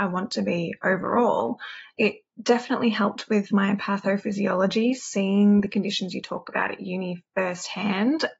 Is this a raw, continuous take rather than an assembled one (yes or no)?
yes